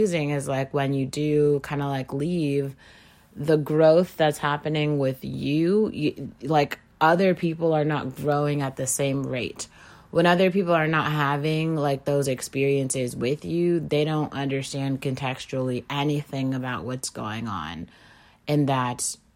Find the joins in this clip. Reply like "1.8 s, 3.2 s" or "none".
none